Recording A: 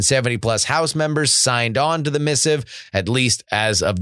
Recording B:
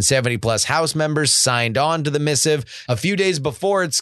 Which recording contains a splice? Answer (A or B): B